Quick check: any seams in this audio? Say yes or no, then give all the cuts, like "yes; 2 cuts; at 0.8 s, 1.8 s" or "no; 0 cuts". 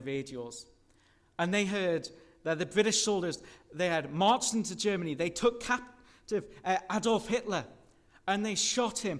no; 0 cuts